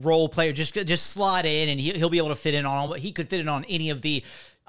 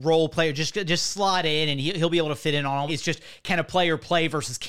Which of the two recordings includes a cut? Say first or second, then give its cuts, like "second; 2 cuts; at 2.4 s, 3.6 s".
second; 1 cut; at 2.9 s